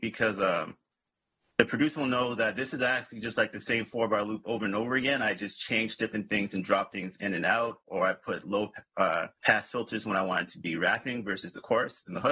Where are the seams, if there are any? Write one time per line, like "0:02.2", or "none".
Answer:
0:09.4

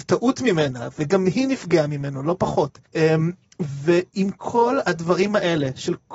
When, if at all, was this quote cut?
0:02.9

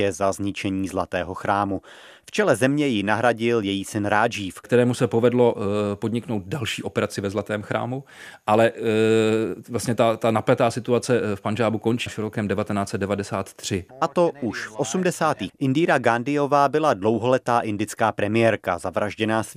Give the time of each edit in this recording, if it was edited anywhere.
0:12.1
0:13.9
0:15.5

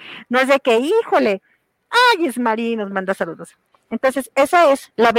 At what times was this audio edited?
0:03.7

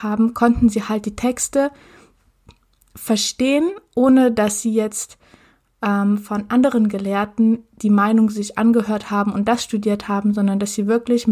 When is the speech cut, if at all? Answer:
none

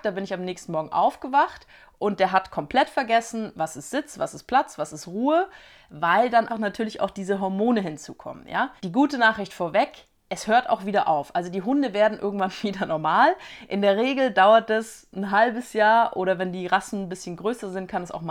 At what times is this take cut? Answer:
0:06.5
0:08.8

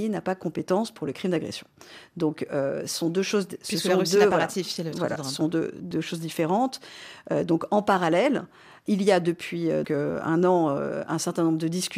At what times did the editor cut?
0:09.8

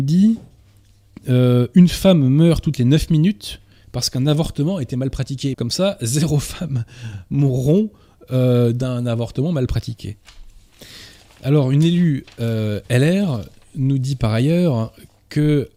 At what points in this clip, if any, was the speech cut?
0:05.5

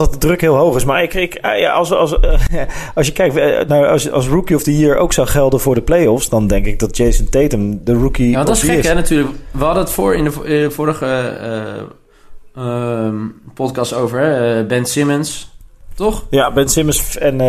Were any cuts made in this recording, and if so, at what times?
none

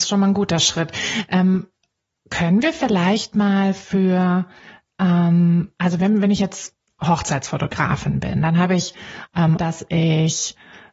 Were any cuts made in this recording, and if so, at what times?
0:09.6

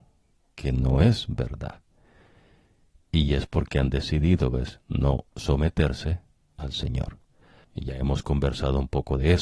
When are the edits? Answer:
0:07.6

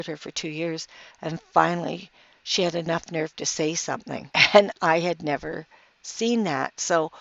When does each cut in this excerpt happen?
none

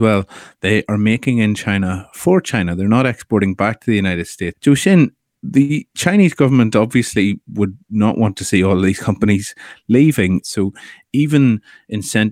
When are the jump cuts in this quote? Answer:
0:04.5
0:10.4

